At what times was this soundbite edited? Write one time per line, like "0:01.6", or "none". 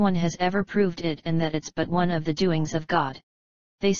none